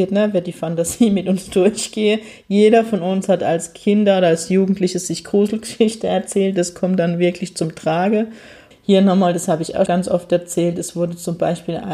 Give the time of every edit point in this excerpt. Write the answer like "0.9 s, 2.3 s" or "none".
8.7 s, 9.9 s